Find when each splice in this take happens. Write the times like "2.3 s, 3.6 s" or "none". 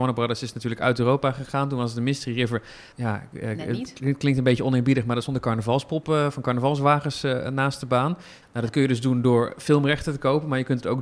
2.9 s, 8.4 s